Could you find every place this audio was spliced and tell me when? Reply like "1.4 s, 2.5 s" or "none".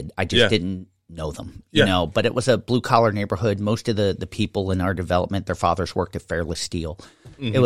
none

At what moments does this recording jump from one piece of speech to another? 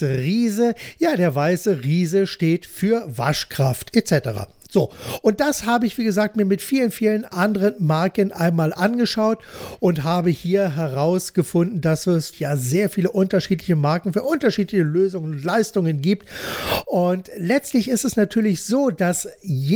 12.3 s

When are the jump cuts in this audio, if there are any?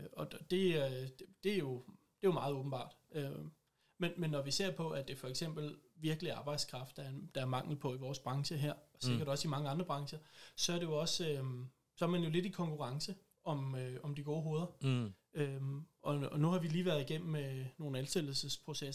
none

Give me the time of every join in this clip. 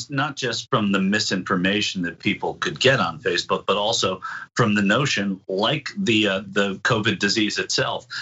6.4 s

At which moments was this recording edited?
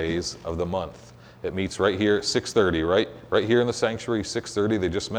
none

